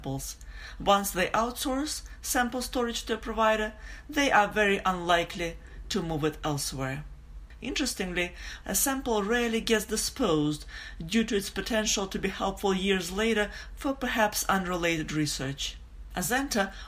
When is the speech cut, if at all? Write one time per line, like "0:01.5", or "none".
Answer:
0:07.6
0:08.6